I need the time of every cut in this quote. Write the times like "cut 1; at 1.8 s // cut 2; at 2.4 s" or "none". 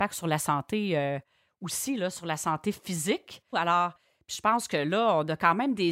cut 1; at 3.5 s